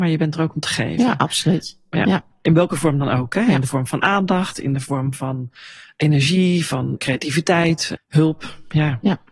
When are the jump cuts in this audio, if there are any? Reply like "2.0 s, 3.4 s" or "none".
8.0 s